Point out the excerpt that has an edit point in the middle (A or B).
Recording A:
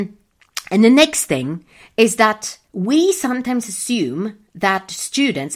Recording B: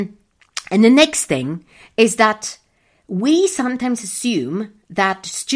A